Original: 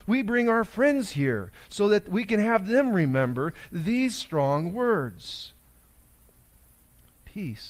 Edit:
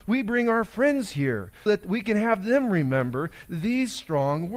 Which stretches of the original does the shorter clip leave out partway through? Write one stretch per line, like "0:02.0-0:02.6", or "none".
0:01.7-0:01.9